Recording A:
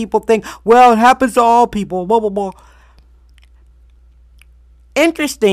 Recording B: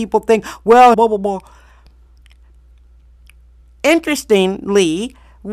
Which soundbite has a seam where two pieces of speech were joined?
B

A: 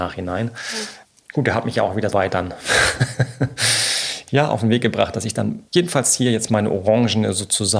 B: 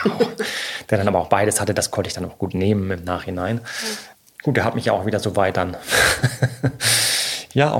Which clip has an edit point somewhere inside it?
A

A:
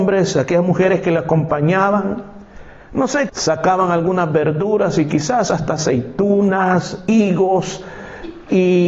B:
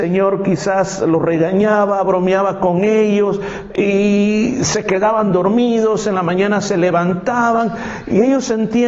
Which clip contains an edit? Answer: A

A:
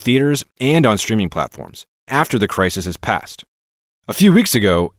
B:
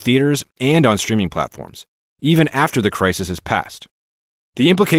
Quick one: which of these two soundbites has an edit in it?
A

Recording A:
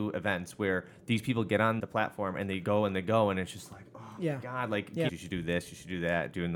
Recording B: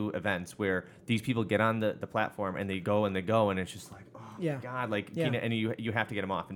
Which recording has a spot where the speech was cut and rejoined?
A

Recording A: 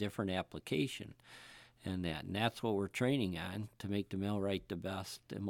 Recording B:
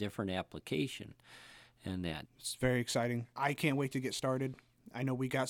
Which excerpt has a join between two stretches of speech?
B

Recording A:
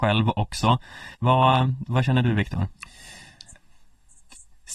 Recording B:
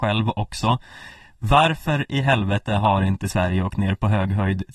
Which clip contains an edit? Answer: A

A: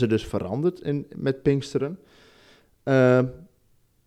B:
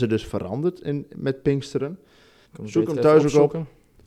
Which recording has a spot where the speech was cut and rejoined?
B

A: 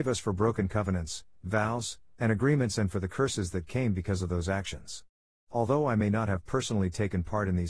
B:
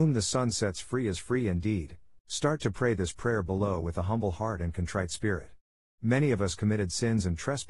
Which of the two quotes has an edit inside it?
B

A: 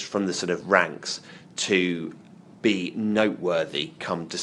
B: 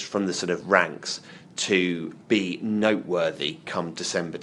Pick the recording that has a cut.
B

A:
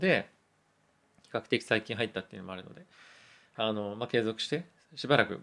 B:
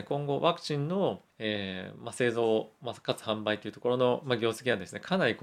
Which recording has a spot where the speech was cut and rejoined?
B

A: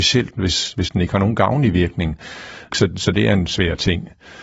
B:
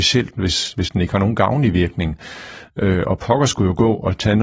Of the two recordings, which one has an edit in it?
A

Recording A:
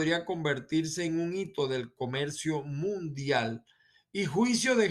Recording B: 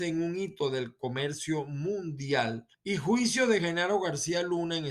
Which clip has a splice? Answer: B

